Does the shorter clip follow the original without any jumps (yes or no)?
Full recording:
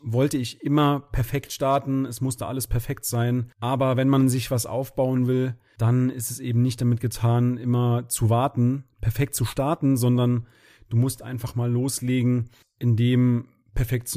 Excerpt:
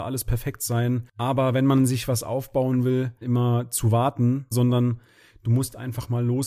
no